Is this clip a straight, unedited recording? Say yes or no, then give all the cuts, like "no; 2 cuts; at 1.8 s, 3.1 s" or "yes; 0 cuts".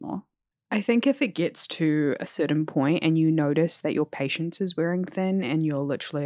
yes; 0 cuts